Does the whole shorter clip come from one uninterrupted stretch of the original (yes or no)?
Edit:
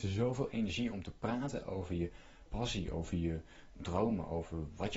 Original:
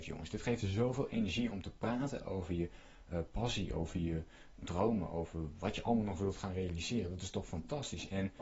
no